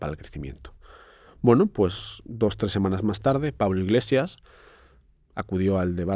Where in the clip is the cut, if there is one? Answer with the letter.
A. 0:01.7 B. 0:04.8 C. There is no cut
C